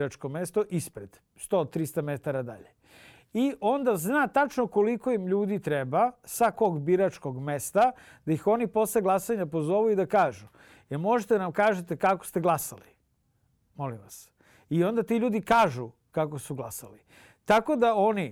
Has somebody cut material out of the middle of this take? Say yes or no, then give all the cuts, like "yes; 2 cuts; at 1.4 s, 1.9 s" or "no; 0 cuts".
no; 0 cuts